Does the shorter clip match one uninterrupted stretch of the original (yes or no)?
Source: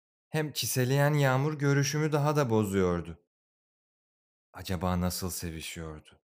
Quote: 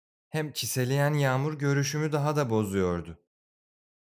yes